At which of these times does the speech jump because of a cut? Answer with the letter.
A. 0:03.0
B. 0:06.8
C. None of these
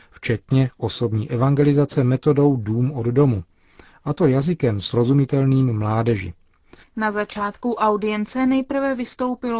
B